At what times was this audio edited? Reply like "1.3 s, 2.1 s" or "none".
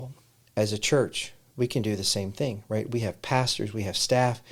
none